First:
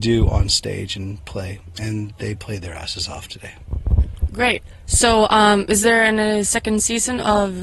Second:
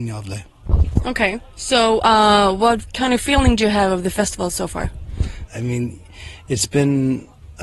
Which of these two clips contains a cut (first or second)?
second